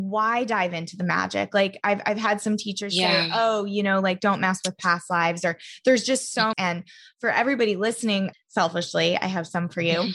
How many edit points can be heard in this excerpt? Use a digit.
2